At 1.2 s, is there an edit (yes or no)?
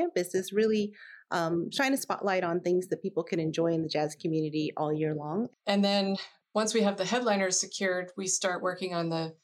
no